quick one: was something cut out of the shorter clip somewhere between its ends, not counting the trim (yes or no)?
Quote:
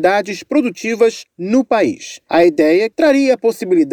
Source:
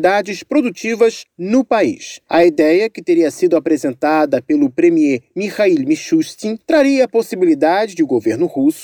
yes